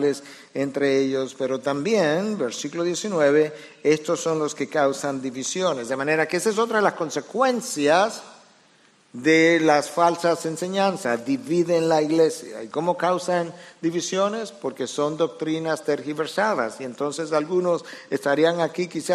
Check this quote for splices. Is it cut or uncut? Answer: uncut